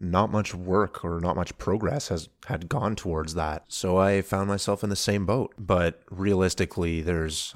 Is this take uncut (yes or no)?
no